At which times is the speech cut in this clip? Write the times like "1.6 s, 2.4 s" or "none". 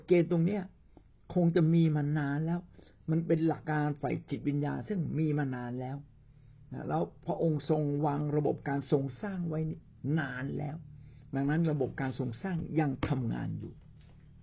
3.6 s